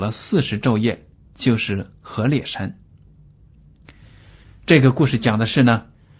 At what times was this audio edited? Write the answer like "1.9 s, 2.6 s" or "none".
1.3 s